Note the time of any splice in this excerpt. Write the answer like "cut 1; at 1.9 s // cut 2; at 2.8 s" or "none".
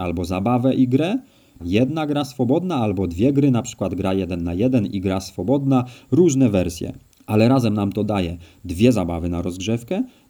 cut 1; at 1.6 s // cut 2; at 6.0 s